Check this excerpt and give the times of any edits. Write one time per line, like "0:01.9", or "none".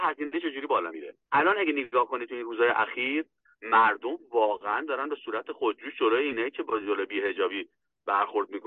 0:01.2

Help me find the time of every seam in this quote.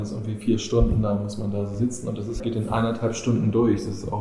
0:02.4

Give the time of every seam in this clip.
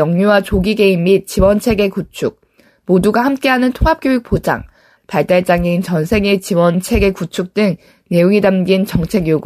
0:05.0

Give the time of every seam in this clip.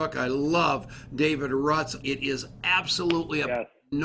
0:02.0

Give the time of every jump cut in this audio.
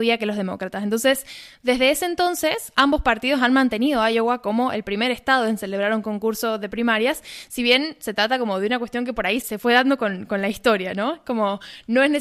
0:09.4

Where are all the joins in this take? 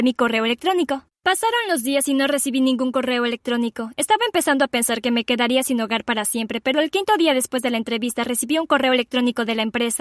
none

